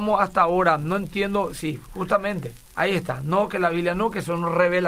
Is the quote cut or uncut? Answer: cut